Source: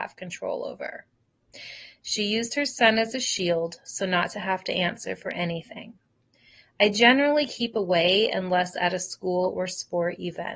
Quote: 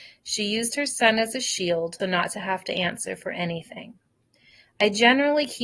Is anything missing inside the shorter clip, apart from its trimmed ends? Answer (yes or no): yes